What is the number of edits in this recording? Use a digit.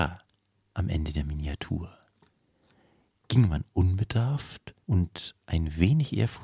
1